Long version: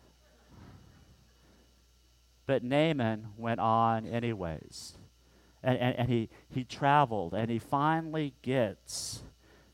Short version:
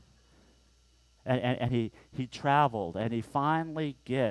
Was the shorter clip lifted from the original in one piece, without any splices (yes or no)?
no